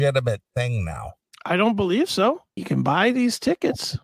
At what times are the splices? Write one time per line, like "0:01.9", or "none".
0:02.6